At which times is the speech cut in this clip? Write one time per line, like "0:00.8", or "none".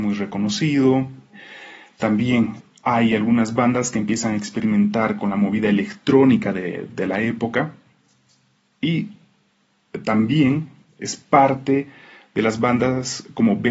none